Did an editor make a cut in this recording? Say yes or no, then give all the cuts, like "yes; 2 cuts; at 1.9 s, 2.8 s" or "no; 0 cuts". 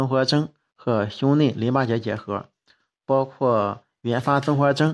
no; 0 cuts